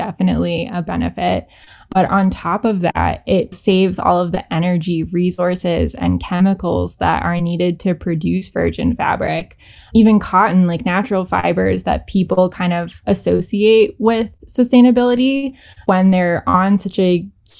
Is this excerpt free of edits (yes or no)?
yes